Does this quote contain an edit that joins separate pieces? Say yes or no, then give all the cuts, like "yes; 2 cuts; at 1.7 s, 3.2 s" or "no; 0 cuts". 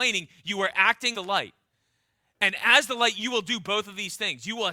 yes; 1 cut; at 1.1 s